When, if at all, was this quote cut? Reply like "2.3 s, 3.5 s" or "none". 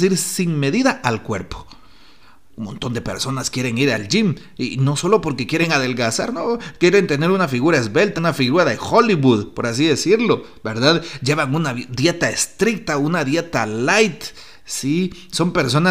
8.2 s